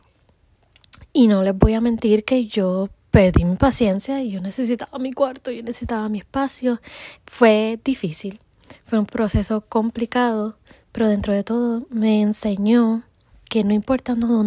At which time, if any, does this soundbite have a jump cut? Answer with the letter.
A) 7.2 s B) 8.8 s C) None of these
A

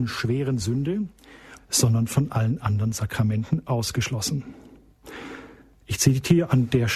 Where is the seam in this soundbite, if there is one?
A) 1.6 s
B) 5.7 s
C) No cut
A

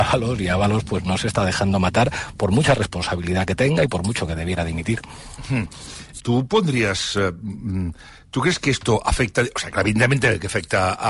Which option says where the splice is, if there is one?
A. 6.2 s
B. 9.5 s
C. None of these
A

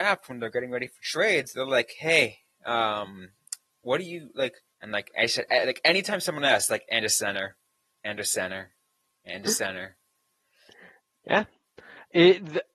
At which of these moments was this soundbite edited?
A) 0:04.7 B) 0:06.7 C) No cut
A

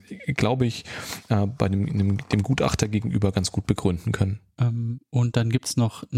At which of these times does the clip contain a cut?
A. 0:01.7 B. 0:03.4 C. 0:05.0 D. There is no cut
D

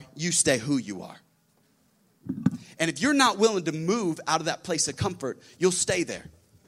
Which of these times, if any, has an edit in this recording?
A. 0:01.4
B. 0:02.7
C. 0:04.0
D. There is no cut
D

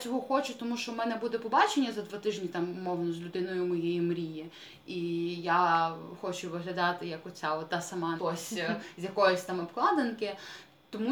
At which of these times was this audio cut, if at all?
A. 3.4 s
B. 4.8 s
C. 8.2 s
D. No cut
C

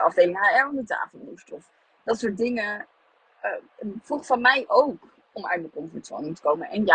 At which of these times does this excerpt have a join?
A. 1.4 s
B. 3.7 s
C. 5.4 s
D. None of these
D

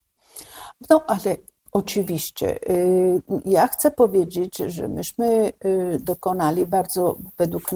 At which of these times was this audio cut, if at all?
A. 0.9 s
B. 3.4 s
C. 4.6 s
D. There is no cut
D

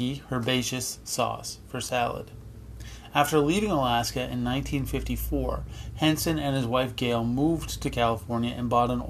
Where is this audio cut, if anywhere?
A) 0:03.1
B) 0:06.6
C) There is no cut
C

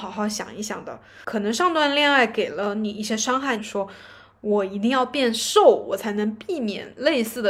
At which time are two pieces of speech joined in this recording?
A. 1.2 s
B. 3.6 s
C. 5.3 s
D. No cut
B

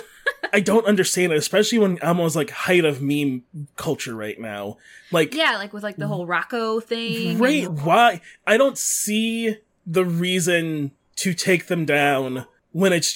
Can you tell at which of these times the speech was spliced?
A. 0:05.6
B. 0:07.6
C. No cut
B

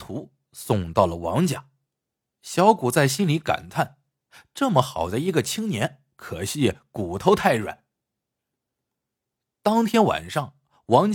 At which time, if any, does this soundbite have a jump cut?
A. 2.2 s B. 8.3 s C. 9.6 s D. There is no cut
A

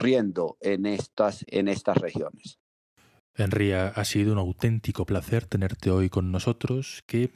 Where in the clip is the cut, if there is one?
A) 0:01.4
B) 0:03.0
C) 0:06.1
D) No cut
A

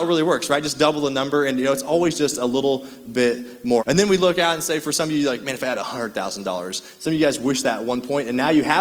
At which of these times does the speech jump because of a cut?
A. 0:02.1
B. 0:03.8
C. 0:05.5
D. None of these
B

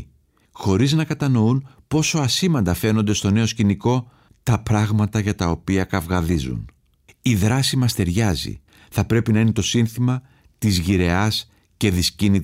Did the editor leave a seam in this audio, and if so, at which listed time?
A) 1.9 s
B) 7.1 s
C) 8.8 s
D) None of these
B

